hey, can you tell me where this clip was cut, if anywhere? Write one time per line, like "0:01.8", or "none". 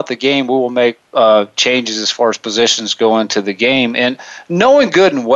none